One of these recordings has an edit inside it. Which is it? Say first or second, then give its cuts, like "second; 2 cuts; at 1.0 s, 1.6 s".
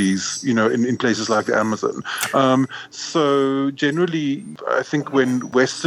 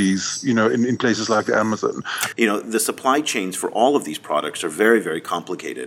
second; 1 cut; at 2.3 s